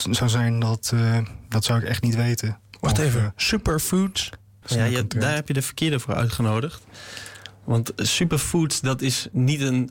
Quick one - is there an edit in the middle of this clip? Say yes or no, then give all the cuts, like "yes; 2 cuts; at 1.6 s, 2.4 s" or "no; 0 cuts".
yes; 1 cut; at 4.6 s